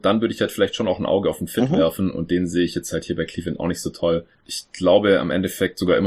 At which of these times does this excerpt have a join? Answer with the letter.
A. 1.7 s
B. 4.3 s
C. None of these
B